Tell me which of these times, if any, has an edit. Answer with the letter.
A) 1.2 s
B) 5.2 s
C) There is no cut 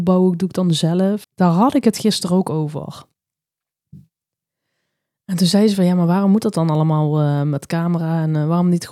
A